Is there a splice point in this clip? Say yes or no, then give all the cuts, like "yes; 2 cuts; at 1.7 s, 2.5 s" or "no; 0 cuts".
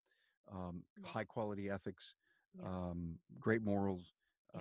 yes; 1 cut; at 0.9 s